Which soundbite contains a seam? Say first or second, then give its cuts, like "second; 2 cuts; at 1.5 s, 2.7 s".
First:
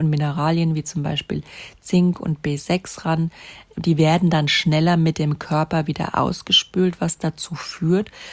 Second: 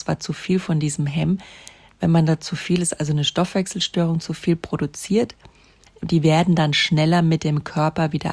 second; 1 cut; at 5.9 s